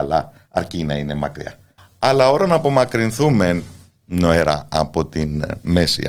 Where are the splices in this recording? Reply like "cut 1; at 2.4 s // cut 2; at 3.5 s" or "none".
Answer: cut 1; at 1.8 s